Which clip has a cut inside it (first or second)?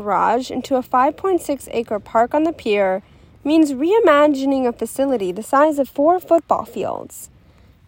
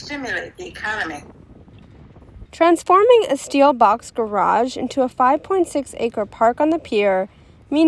second